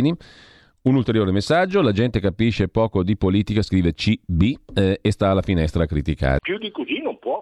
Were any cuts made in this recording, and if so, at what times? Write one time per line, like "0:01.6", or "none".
0:06.4